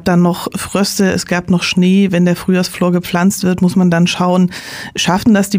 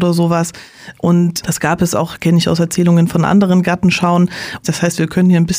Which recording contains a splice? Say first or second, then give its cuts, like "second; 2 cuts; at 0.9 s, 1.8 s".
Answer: second; 2 cuts; at 1.4 s, 4.6 s